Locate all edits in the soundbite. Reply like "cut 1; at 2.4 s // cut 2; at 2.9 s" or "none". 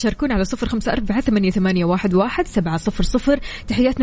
none